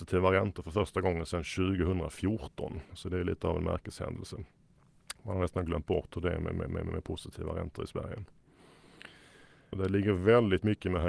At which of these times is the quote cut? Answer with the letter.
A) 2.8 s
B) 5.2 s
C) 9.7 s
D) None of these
C